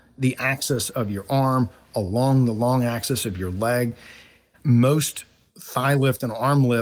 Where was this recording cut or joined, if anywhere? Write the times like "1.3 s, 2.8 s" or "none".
4.5 s